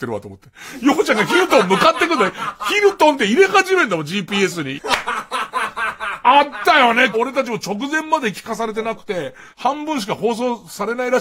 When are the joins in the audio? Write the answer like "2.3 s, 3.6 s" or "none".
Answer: 4.8 s, 7.1 s, 9.5 s